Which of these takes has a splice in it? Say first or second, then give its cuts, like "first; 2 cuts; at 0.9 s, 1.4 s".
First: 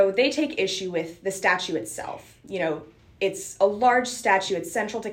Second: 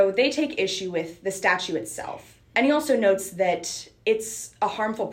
second; 1 cut; at 2.4 s